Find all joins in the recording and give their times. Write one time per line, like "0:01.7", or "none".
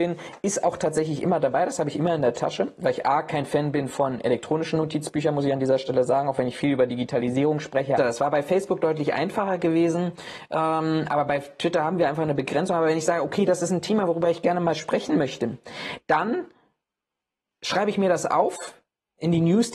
0:08.0